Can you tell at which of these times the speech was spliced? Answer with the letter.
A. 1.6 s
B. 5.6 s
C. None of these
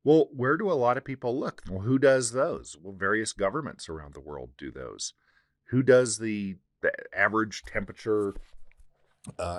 A